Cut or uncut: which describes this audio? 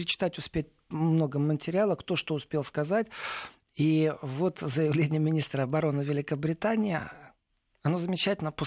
uncut